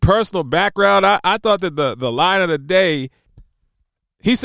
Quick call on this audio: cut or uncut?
uncut